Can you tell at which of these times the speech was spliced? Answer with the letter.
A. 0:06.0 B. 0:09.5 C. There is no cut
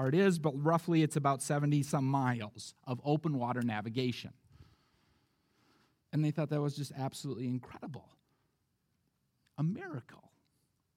A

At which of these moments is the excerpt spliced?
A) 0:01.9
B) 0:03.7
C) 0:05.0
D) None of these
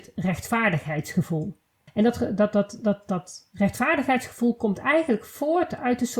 A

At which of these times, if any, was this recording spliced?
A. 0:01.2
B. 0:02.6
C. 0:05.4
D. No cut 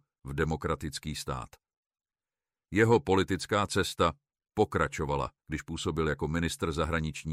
C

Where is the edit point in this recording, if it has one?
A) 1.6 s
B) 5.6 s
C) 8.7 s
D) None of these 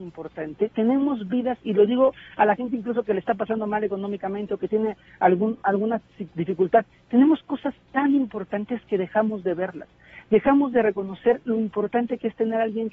D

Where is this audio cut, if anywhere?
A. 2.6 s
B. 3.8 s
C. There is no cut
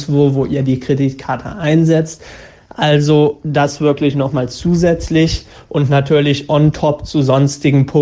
C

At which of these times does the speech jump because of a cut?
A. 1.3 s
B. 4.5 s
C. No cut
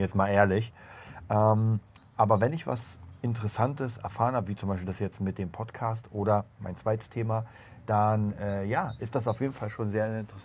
C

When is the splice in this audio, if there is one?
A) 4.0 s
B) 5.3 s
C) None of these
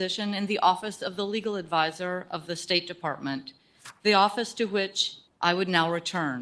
B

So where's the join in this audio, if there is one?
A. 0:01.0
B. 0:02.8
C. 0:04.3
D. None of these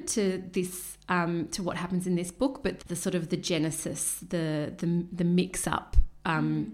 B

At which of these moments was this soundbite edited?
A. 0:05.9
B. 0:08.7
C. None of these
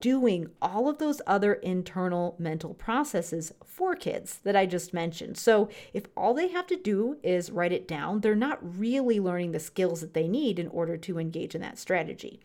C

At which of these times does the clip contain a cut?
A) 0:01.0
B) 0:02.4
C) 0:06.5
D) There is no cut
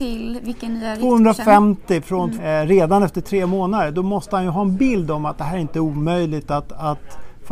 B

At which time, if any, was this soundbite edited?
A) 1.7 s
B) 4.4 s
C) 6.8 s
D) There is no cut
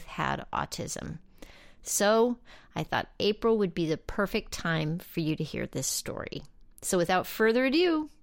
D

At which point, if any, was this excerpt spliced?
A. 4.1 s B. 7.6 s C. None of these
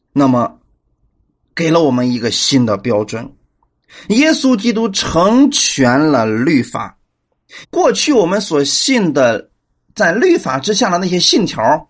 B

